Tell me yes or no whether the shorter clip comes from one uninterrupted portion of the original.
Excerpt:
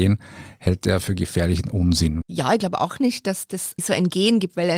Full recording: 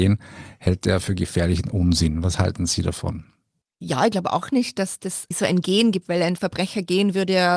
no